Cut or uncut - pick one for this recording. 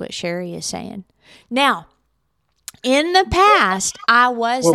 uncut